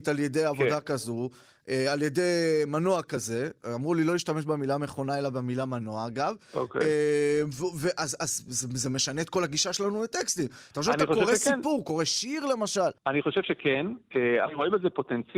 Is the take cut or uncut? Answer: cut